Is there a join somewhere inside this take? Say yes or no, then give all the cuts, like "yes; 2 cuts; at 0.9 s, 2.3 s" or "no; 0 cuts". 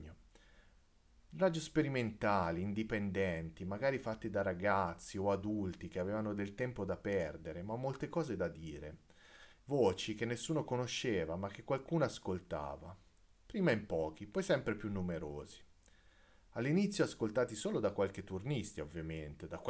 yes; 1 cut; at 9.6 s